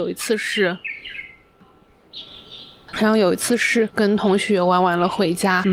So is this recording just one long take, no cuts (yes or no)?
no